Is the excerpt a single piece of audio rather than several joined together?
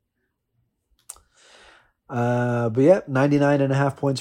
yes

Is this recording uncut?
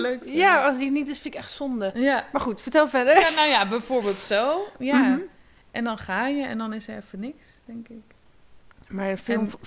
yes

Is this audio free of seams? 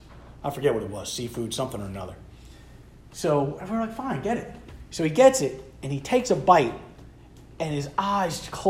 yes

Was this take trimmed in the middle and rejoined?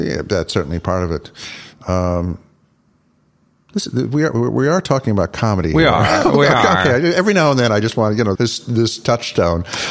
yes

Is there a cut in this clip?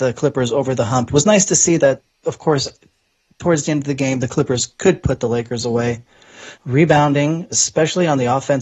yes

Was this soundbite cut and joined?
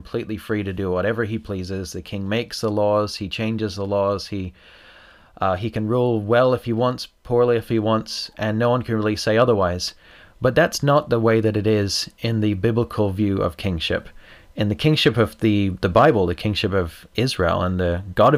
no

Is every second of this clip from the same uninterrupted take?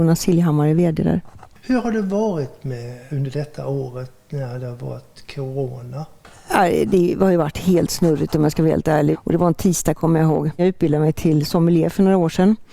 no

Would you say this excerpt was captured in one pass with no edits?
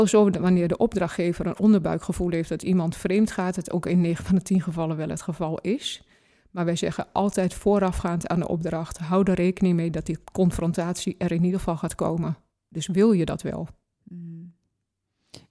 yes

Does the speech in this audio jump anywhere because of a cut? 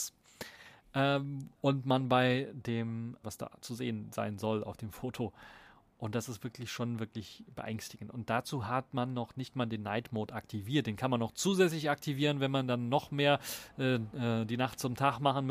yes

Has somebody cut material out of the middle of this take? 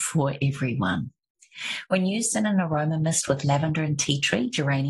no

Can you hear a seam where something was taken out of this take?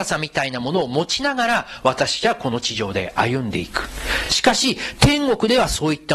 no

